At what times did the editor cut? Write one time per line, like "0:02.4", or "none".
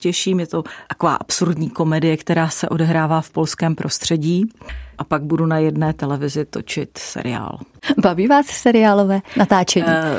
none